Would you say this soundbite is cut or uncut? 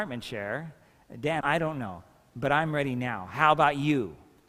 cut